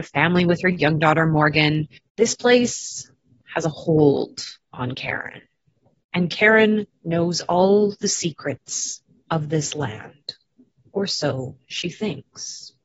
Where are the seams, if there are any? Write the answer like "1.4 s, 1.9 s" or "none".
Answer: 2.0 s